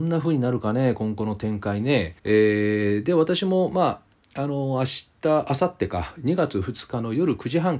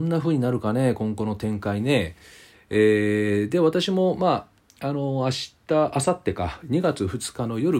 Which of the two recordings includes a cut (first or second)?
first